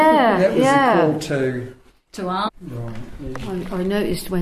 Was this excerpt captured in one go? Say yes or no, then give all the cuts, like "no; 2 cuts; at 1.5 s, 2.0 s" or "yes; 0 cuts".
no; 1 cut; at 2.5 s